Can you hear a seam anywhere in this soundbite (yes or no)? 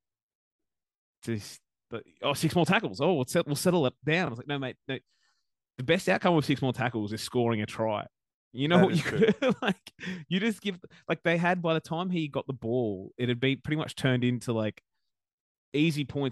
no